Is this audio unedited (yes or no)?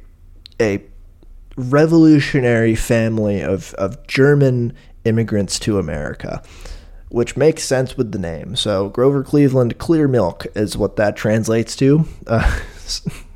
yes